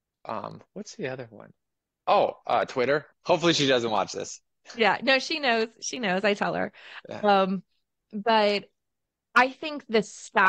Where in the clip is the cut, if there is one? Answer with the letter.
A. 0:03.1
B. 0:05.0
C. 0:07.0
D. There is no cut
A